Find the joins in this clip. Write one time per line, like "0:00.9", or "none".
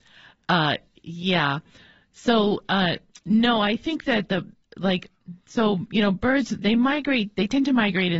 none